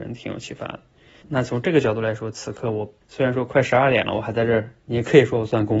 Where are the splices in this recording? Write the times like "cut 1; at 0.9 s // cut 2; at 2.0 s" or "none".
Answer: cut 1; at 1.2 s // cut 2; at 3.0 s